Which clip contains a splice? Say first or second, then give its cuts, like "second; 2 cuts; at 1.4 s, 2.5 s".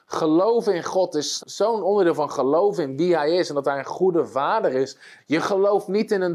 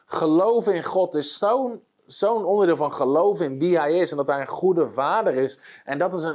first; 2 cuts; at 1.4 s, 5.2 s